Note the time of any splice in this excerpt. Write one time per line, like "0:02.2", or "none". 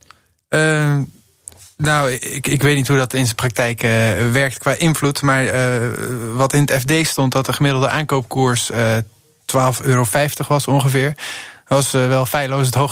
none

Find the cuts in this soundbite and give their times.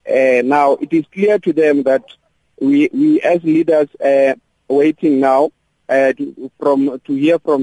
0:06.2

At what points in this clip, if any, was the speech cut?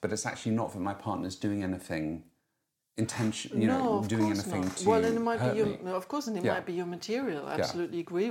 none

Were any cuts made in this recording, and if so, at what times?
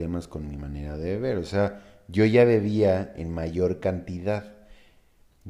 none

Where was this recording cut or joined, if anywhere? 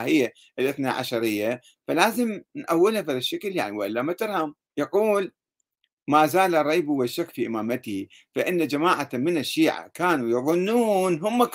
0:04.6

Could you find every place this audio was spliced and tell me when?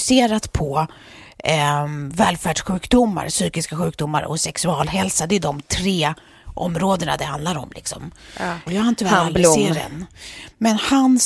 0:08.7

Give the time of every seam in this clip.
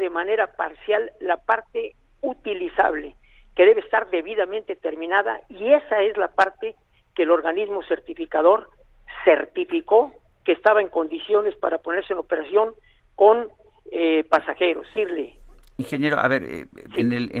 0:15.0

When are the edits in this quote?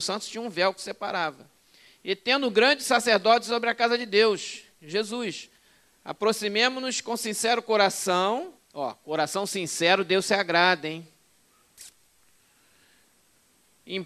0:08.6

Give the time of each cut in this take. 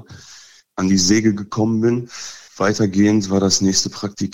0:02.5

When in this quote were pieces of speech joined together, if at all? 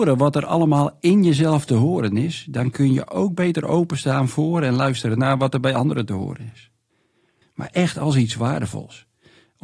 0:07.4

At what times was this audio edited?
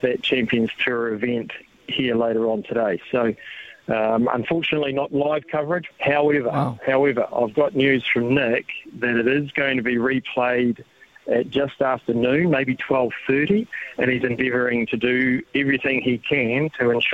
0:05.9

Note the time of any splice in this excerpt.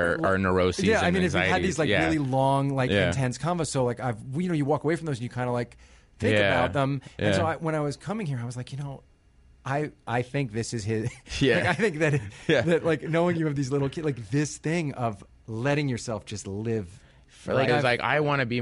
0:15.3
0:17.7

